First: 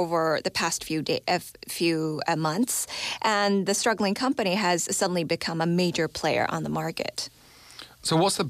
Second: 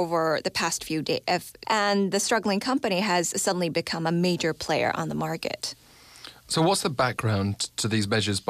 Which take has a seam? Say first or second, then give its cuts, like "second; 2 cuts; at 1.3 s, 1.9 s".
second; 1 cut; at 1.6 s